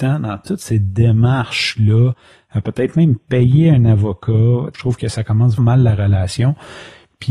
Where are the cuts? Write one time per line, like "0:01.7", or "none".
0:05.6